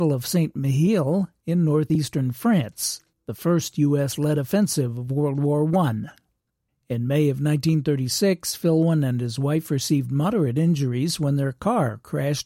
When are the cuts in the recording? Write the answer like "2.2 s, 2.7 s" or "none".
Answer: 6.7 s

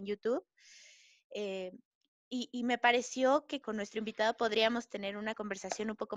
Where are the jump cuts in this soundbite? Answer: 3.6 s

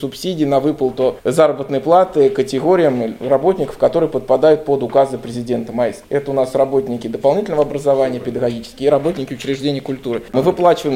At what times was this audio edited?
none

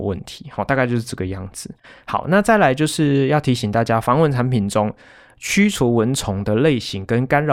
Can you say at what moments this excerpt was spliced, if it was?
none

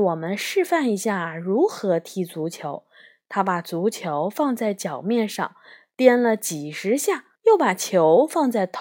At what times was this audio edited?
7.4 s

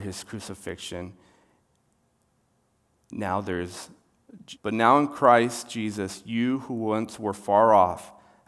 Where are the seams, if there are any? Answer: 4.6 s

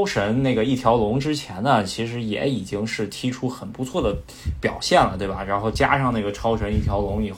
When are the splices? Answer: none

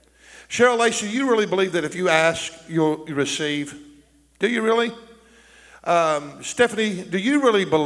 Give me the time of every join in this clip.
none

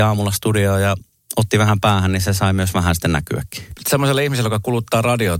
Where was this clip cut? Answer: 3.7 s

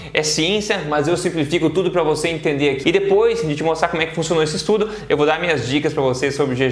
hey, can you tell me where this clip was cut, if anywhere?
2.8 s

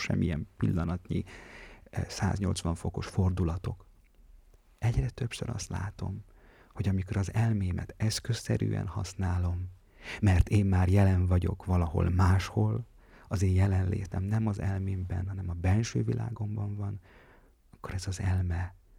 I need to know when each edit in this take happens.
none

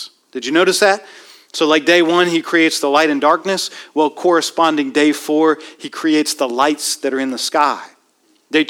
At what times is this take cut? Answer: none

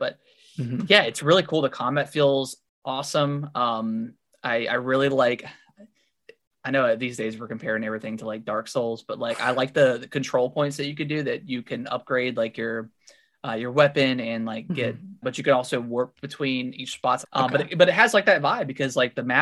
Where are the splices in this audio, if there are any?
15.2 s, 17.2 s

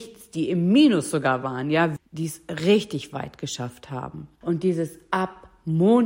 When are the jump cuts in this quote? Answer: 2.0 s, 4.4 s

